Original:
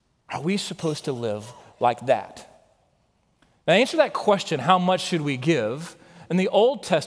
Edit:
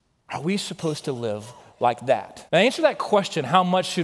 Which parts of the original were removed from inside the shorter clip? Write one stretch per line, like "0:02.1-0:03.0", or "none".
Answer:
0:02.5-0:03.6

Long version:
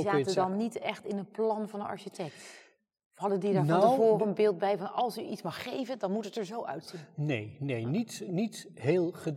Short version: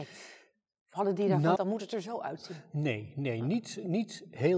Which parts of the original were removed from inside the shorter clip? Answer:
0:03.8-0:06.0

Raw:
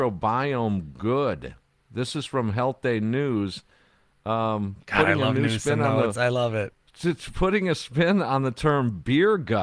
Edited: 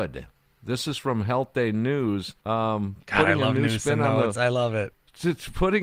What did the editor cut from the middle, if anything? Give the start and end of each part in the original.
0:03.7-0:04.2

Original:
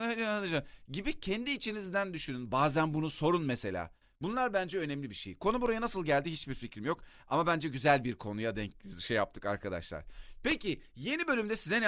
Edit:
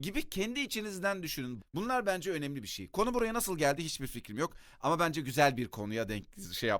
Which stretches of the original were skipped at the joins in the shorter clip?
0:02.5-0:04.1

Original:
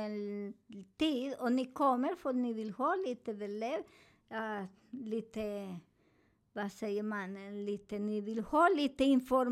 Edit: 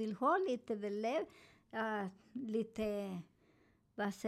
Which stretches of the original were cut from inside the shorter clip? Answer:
none

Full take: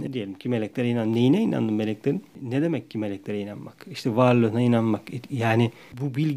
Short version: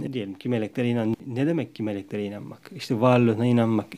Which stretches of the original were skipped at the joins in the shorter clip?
0:01.1-0:02.3

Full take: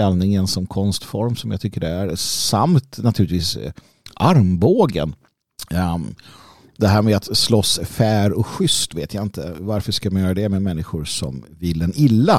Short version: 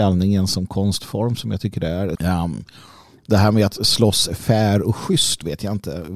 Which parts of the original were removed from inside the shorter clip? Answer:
0:02.2-0:05.7

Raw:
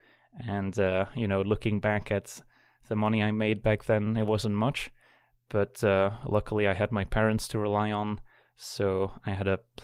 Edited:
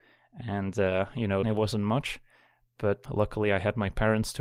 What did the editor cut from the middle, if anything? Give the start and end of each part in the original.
0:01.4-0:04.1
0:05.8-0:06.2

